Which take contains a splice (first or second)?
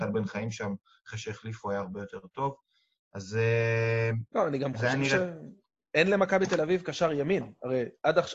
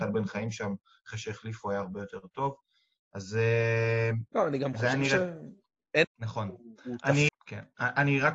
second